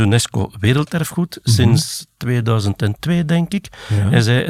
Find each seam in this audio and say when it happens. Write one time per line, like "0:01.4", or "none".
none